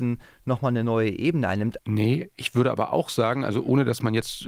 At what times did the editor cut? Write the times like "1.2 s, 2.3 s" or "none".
1.8 s